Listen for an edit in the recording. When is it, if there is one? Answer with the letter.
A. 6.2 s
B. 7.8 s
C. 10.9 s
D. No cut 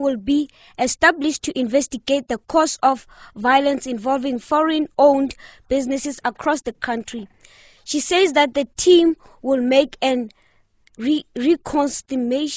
A